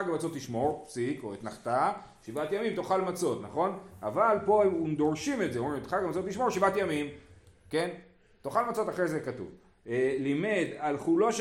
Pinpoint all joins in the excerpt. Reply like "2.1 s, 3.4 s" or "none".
none